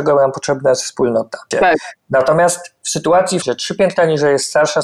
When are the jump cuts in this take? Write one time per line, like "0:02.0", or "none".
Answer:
0:01.5
0:03.4